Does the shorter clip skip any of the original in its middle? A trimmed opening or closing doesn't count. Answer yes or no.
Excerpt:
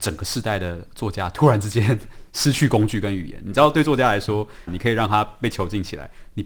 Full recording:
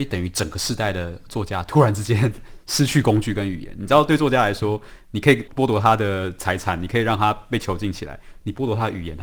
yes